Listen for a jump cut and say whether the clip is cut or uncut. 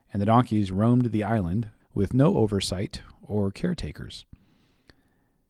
cut